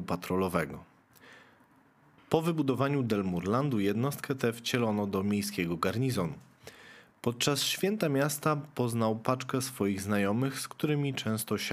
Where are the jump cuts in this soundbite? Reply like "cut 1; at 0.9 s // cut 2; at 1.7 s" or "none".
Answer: none

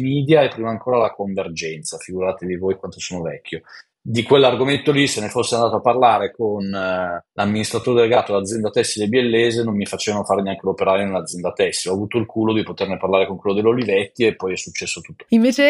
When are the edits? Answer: none

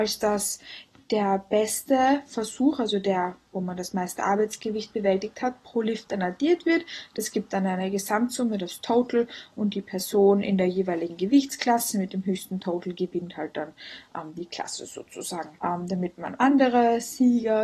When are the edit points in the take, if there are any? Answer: cut 1; at 15.6 s

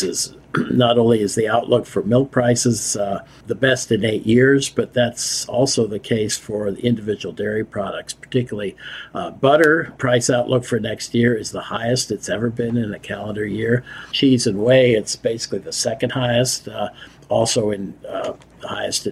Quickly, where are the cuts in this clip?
none

